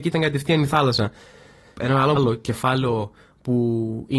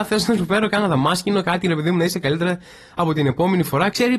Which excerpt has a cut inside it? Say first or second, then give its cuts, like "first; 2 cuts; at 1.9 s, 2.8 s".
first; 1 cut; at 2.2 s